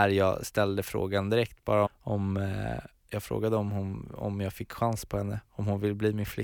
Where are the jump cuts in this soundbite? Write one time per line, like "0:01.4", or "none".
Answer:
0:01.9